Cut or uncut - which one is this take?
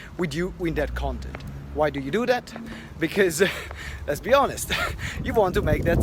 uncut